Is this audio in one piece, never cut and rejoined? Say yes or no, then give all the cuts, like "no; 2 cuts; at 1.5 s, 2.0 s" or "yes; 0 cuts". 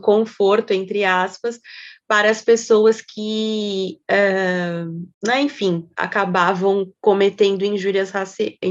no; 1 cut; at 5.1 s